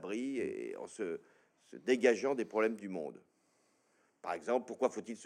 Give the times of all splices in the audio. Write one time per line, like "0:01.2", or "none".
none